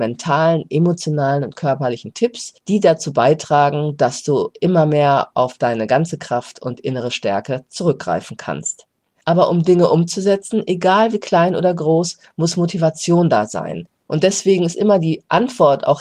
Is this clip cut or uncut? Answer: cut